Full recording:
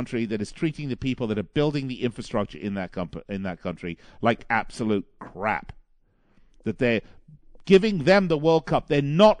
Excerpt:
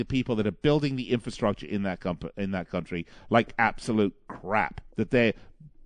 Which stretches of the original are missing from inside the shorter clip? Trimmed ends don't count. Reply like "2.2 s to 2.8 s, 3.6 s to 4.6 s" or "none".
5.8 s to 6.6 s

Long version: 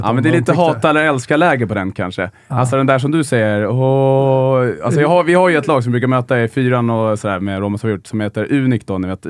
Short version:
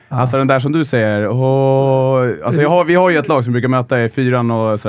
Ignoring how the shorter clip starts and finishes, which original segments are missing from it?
none

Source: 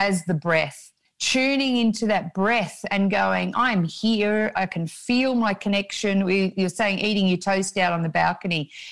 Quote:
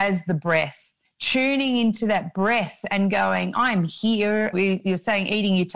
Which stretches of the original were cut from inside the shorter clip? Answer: 4.5 s to 6.2 s

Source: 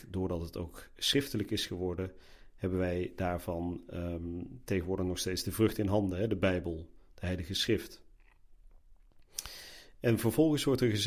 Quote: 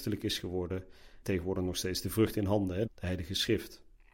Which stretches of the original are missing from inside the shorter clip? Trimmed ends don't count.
2.5 s to 4.6 s, 6.3 s to 7.1 s

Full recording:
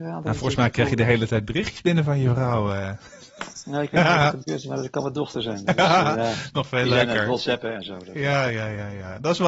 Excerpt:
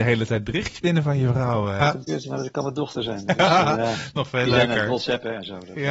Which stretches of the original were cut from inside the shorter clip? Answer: 2.8 s to 4.2 s

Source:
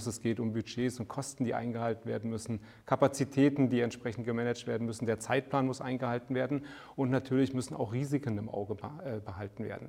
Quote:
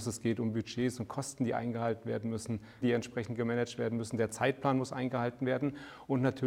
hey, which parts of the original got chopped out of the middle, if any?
2.8 s to 3.7 s

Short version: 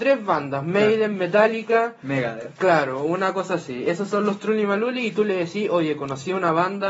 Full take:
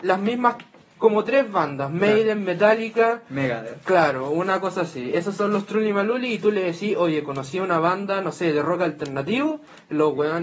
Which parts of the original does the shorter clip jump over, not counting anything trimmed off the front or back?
none

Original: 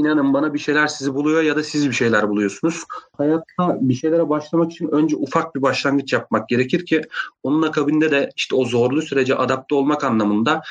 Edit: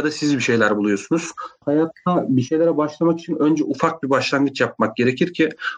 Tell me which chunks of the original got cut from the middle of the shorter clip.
none

